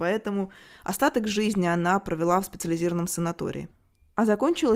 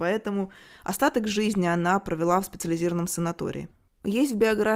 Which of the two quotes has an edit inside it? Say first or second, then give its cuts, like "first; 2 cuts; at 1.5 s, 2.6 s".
second; 1 cut; at 3.9 s